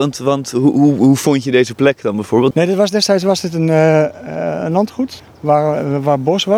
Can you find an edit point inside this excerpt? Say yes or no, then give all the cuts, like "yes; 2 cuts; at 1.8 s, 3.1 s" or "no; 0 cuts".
yes; 1 cut; at 2.5 s